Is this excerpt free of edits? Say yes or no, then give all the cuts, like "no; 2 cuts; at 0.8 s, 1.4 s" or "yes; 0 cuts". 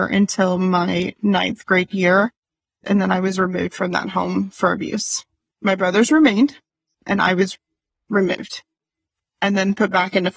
yes; 0 cuts